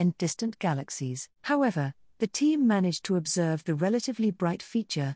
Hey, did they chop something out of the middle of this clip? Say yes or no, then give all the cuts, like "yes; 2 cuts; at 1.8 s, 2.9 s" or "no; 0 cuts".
yes; 1 cut; at 1.4 s